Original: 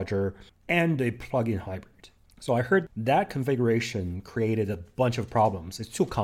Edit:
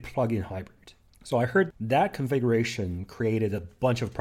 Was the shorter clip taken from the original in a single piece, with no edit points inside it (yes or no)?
yes